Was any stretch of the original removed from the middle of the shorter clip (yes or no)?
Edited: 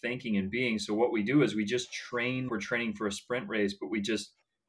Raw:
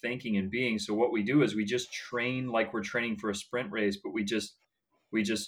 yes